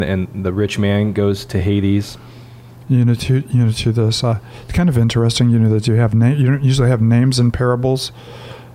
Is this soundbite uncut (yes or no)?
no